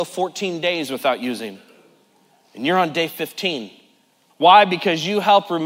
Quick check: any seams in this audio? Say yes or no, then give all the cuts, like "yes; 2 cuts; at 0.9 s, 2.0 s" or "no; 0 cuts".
yes; 1 cut; at 4.3 s